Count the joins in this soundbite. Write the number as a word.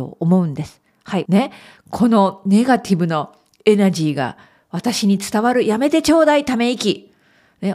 one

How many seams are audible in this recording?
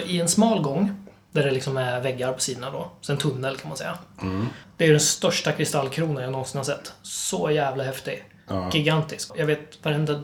one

